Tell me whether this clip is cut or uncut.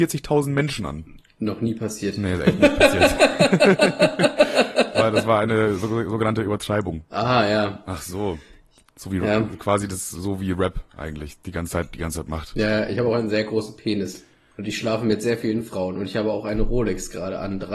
uncut